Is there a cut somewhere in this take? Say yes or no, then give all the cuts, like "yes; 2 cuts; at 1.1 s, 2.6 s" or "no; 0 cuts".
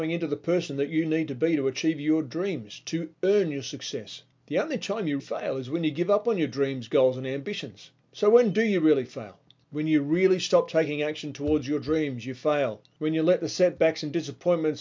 yes; 1 cut; at 5.2 s